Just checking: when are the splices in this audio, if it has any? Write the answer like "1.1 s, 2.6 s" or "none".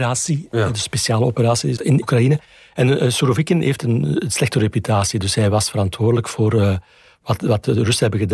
1.8 s